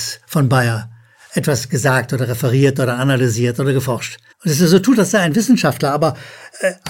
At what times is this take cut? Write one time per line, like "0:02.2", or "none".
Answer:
0:04.3